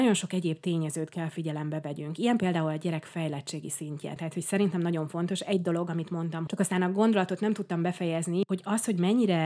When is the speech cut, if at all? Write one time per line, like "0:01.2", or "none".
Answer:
0:04.2
0:06.5